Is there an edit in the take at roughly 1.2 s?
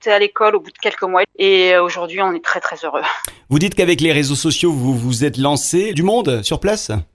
yes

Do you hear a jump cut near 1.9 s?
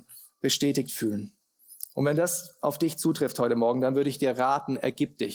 no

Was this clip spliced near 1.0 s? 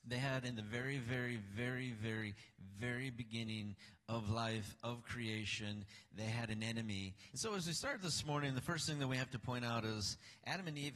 no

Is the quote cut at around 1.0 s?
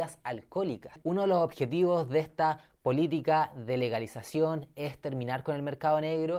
yes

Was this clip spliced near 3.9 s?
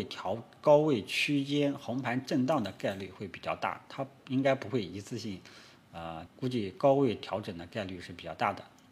no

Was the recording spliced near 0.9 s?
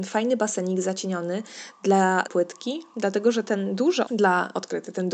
no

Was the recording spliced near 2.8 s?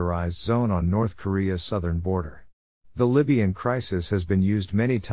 yes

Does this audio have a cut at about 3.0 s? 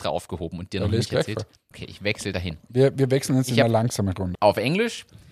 no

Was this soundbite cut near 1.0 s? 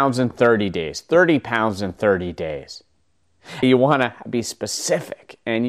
no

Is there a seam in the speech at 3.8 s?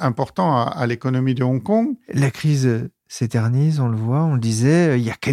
no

